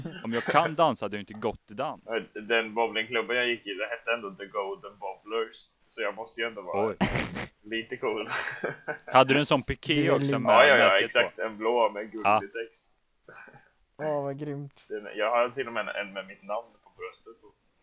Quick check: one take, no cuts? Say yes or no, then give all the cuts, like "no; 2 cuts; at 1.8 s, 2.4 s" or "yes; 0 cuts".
yes; 0 cuts